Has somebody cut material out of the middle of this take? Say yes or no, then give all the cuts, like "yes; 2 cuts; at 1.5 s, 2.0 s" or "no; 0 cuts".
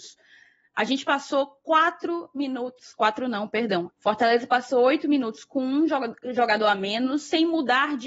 yes; 1 cut; at 3.9 s